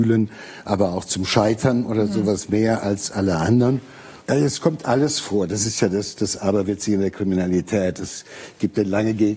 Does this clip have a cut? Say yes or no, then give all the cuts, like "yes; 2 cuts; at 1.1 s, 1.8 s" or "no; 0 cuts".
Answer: yes; 1 cut; at 4.2 s